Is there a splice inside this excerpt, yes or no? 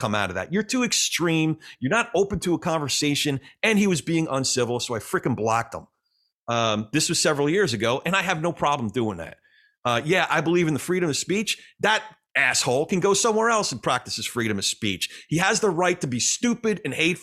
yes